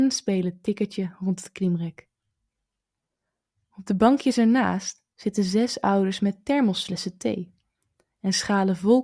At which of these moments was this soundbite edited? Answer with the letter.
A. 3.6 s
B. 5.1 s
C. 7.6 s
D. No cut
B